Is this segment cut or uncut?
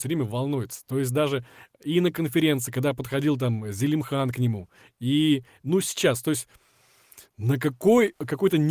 uncut